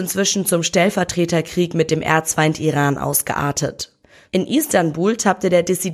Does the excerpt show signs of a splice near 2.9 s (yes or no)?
no